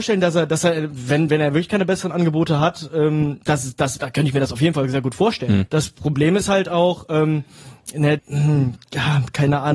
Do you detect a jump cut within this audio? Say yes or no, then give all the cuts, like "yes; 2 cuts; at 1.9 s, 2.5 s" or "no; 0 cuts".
yes; 2 cuts; at 5.7 s, 8.2 s